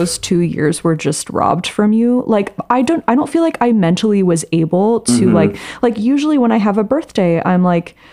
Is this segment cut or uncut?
uncut